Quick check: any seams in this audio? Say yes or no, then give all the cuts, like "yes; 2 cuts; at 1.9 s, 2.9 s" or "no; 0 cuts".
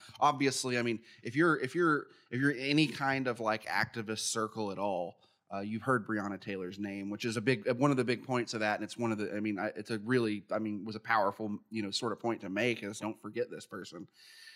yes; 1 cut; at 13.0 s